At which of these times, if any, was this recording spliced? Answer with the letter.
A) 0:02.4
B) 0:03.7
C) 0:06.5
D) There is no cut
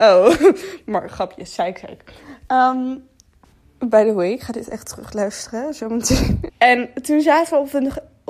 C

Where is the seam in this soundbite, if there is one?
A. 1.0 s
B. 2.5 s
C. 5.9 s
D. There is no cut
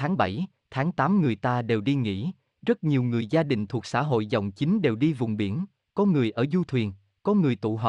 B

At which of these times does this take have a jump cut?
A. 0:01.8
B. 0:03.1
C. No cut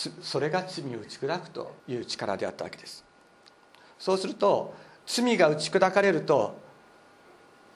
A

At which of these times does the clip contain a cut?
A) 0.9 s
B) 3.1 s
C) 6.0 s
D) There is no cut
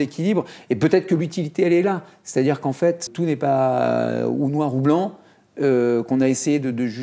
B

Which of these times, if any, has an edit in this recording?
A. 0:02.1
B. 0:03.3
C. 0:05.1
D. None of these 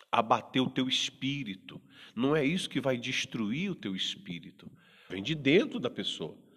C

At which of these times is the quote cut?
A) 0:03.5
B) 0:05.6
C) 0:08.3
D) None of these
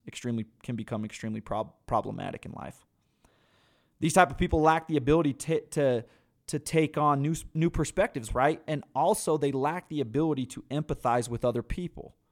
C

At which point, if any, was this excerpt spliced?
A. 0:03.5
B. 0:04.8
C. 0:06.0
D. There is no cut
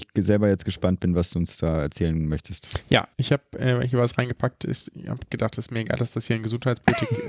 D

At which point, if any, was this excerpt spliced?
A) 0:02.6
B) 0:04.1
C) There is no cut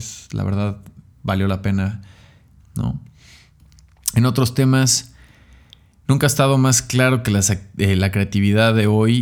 A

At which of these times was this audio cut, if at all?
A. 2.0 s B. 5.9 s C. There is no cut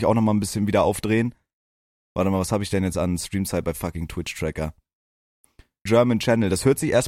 B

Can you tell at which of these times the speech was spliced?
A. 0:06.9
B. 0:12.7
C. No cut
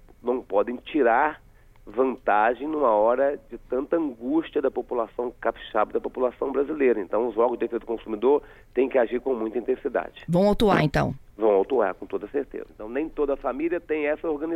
B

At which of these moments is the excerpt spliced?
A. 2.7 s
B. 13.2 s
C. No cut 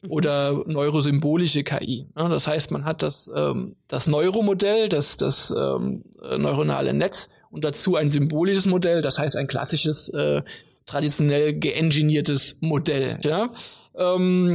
B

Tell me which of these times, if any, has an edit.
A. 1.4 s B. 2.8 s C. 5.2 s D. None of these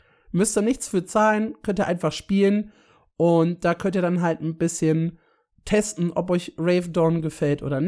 D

